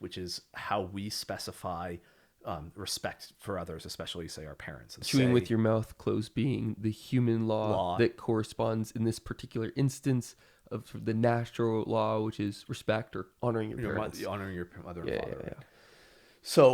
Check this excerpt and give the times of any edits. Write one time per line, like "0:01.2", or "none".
none